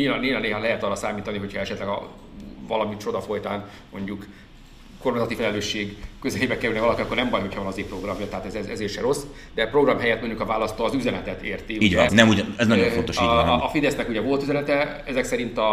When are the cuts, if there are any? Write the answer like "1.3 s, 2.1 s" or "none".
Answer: 12.1 s, 13.6 s